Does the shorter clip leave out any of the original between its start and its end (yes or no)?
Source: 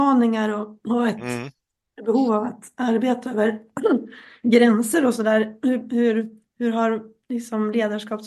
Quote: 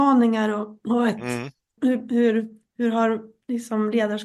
yes